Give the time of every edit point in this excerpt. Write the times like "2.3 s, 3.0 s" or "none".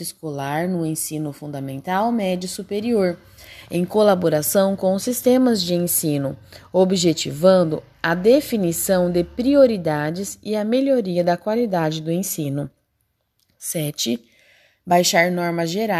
none